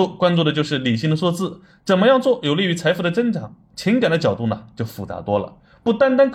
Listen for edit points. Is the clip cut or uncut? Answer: uncut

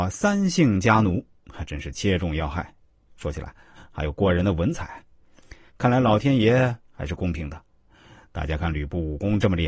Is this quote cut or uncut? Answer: cut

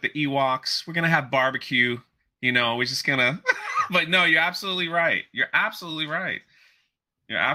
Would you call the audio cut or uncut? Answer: uncut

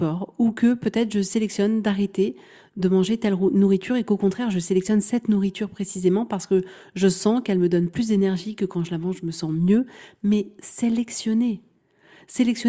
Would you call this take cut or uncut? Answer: uncut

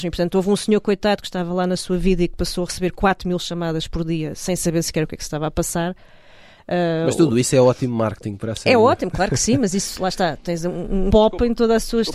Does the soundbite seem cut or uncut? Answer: cut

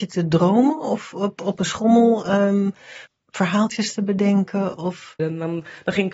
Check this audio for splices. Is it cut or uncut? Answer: cut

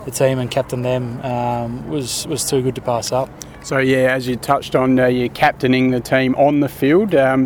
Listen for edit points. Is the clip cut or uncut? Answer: uncut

